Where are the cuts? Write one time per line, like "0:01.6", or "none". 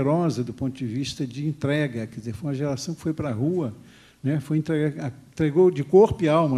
none

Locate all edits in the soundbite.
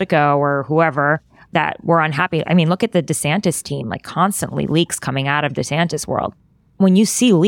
none

